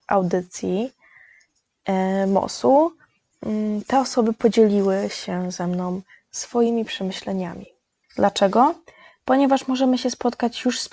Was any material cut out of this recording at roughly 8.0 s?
yes; 1 cut; at 8.0 s

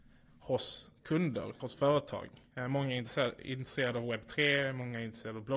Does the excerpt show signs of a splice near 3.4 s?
no; 1 cut; at 1.6 s

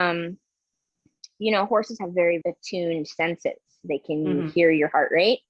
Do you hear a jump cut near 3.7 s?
no; 1 cut; at 2.4 s

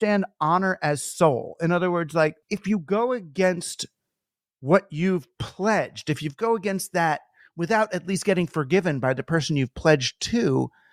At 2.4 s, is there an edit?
yes; 1 cut; at 2.4 s

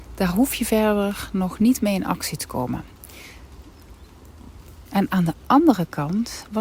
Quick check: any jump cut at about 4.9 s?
yes; 1 cut; at 4.9 s

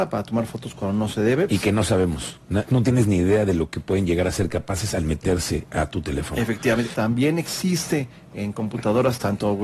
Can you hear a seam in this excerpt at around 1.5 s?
yes; 3 cuts; at 1.5 s, 2.7 s, 6.9 s

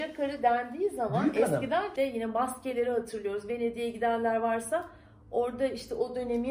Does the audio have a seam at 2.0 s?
yes; 1 cut; at 2.0 s

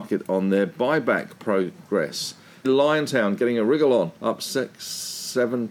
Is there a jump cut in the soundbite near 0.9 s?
no; 2 cuts; at 2.6 s, 4.2 s

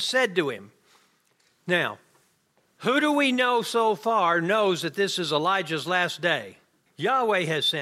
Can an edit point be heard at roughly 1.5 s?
no; 1 cut; at 6.9 s

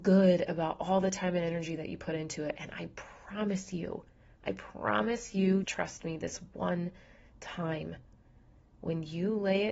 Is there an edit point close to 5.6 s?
yes; 1 cut; at 5.6 s

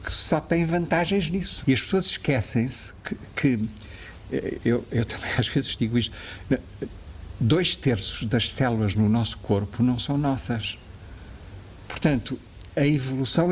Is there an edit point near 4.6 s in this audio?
no; 2 cuts; at 1.6 s, 11.8 s

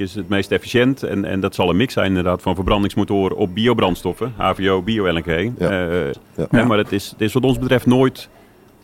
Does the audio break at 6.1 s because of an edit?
yes; 1 cut; at 6.1 s

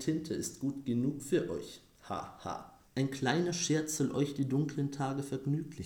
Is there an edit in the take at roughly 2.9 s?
yes; 1 cut; at 2.9 s

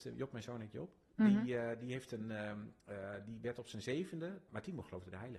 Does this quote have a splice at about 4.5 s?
yes; 1 cut; at 4.5 s

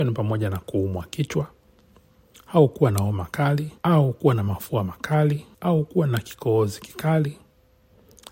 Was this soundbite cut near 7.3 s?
no; 2 cuts; at 3.8 s, 5.5 s

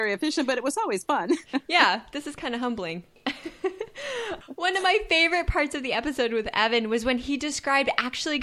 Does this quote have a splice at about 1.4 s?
no; 0 cuts

